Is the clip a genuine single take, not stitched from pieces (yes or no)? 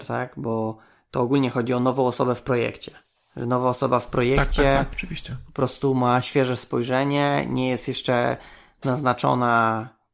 yes